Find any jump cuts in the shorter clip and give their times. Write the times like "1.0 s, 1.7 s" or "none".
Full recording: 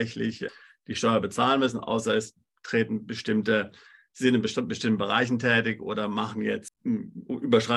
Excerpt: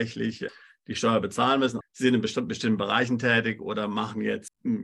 1.8 s